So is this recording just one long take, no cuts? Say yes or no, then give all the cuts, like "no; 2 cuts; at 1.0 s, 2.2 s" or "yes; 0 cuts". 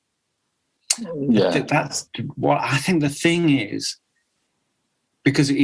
yes; 0 cuts